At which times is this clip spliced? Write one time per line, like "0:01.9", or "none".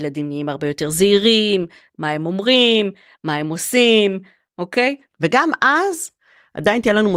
none